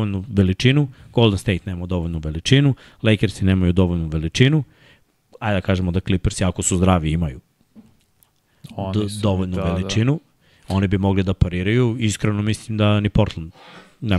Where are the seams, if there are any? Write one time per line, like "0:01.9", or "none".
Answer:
none